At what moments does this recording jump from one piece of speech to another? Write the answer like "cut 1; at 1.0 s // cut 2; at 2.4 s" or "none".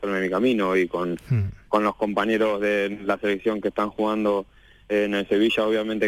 none

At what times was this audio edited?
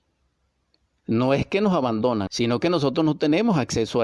cut 1; at 2.3 s

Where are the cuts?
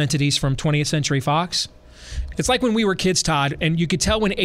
cut 1; at 2.3 s

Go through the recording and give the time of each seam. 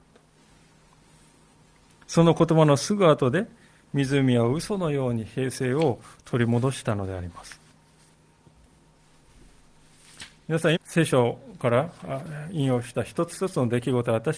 cut 1; at 10.8 s

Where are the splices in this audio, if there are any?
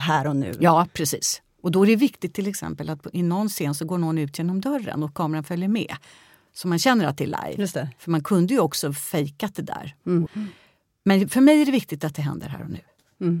cut 1; at 10.3 s

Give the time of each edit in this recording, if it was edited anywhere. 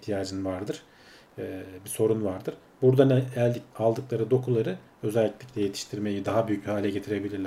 none

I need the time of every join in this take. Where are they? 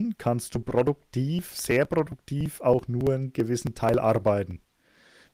none

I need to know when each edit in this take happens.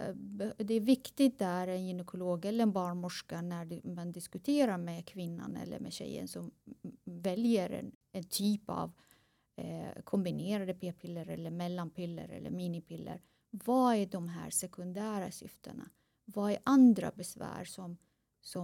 none

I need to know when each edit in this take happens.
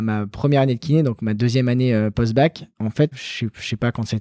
cut 1; at 3.1 s

